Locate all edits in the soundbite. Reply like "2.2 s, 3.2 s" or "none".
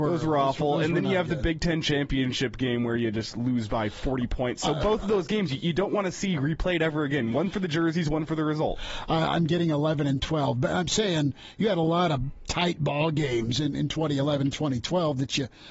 none